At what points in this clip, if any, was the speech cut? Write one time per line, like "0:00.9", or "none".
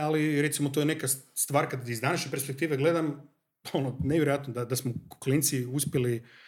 none